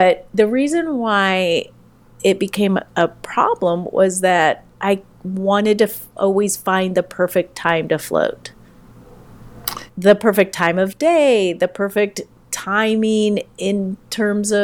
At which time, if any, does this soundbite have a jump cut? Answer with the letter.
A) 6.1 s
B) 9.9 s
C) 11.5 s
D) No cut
B